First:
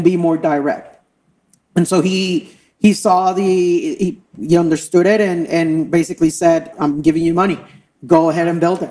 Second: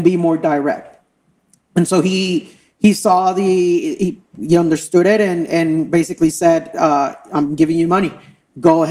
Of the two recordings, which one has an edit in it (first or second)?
first